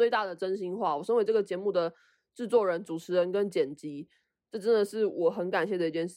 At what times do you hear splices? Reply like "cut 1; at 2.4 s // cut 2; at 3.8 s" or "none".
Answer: none